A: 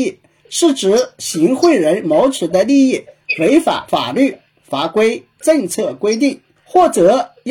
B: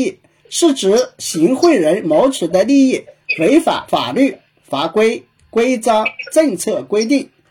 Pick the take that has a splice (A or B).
A